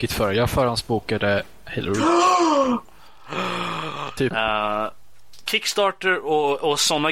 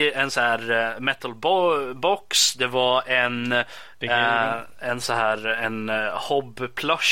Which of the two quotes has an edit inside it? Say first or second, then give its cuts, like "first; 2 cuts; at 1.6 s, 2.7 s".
first; 1 cut; at 4.3 s